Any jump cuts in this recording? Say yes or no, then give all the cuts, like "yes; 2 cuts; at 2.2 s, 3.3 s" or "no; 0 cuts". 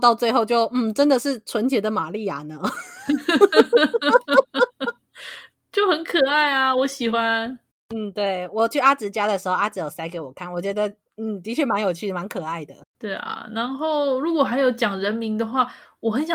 no; 0 cuts